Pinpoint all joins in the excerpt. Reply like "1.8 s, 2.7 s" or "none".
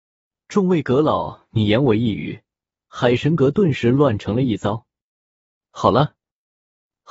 none